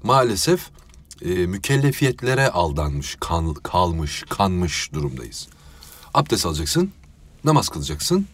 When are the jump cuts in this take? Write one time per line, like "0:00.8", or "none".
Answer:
none